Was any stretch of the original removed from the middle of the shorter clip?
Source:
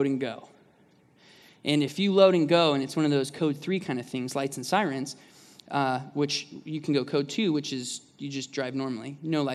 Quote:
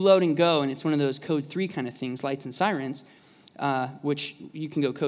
no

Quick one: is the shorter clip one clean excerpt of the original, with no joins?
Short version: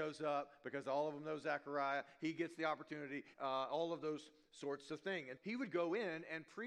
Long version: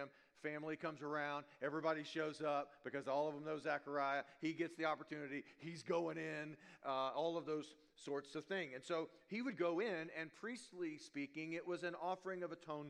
no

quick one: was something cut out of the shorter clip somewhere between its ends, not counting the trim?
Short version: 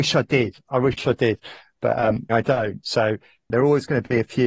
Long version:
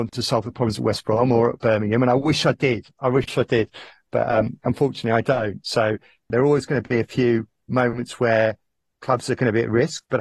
yes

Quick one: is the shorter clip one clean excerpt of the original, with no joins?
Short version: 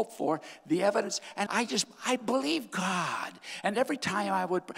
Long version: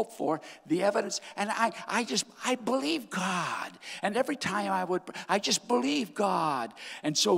no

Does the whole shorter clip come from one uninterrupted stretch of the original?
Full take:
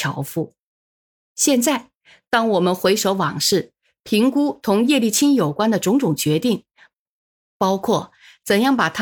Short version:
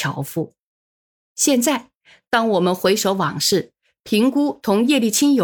yes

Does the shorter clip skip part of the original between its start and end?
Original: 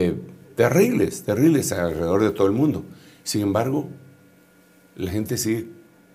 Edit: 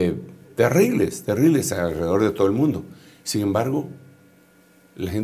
no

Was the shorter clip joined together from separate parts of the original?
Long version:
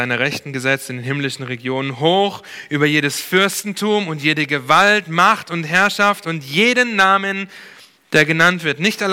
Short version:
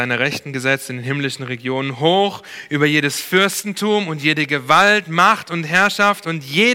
no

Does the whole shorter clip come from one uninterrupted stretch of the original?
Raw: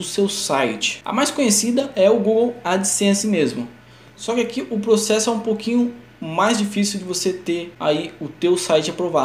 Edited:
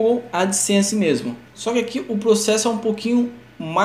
no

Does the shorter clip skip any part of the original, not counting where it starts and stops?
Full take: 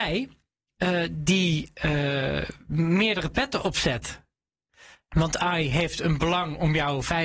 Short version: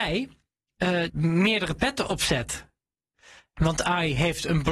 yes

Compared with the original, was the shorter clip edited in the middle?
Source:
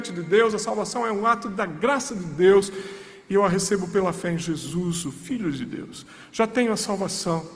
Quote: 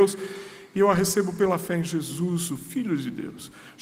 no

